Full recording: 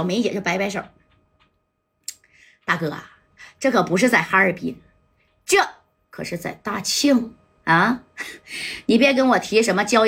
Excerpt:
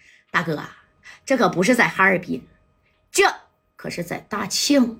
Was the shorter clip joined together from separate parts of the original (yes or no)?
no